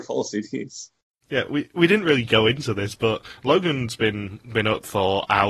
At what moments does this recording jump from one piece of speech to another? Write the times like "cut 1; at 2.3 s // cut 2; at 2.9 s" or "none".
none